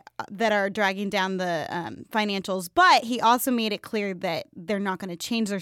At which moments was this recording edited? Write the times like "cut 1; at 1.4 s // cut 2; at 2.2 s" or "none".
none